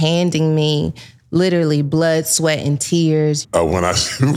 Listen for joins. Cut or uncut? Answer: cut